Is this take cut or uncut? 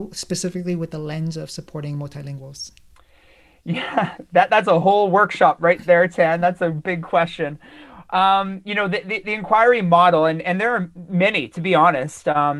uncut